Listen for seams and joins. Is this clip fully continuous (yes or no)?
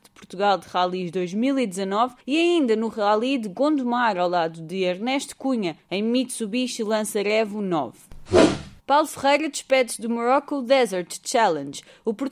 no